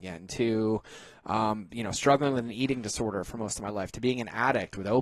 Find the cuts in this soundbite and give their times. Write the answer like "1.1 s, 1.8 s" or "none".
none